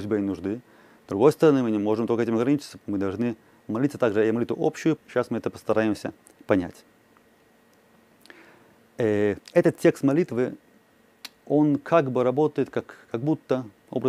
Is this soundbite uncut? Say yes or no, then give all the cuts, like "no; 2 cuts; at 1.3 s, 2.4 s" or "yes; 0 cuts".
no; 2 cuts; at 5.0 s, 9.4 s